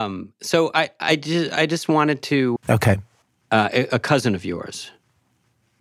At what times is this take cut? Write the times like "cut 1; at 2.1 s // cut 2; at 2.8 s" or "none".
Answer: cut 1; at 2.6 s